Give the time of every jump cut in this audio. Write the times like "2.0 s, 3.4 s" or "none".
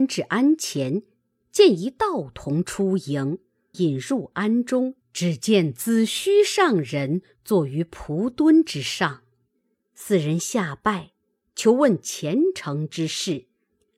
3.7 s, 5.0 s